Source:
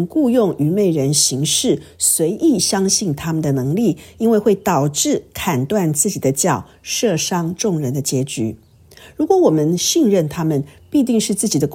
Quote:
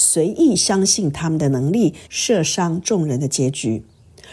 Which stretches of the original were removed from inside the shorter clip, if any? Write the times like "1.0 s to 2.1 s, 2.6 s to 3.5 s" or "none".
4.1 s to 6.8 s